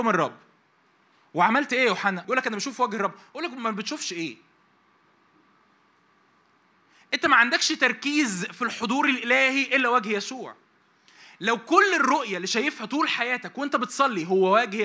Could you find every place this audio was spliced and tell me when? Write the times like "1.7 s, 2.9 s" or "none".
2.2 s